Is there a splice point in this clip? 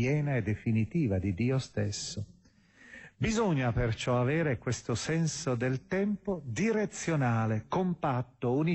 no; 0 cuts

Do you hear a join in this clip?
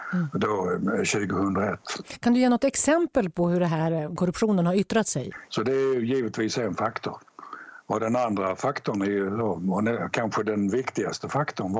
yes; 1 cut; at 5.5 s

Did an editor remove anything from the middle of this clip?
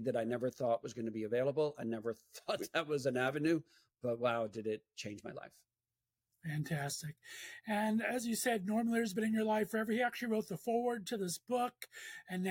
no; 0 cuts

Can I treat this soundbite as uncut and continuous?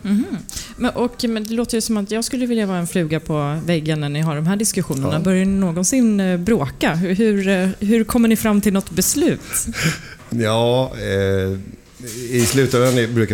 no; 1 cut; at 10.3 s

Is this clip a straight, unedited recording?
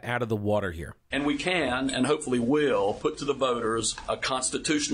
no; 1 cut; at 1.1 s

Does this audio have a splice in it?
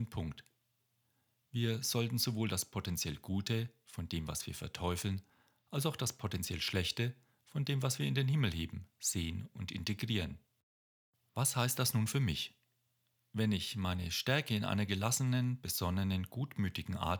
no; 0 cuts

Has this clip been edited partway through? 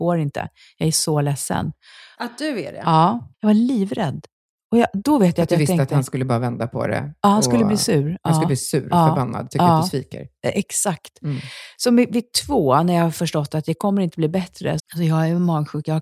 yes; 3 cuts; at 2.2 s, 3.3 s, 14.8 s

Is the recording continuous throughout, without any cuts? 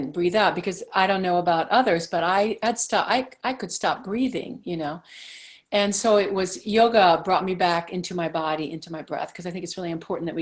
yes; 0 cuts

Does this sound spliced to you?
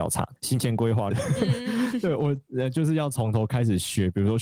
yes; 1 cut; at 1.1 s

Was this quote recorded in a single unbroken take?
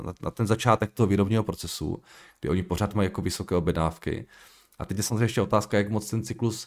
yes; 0 cuts

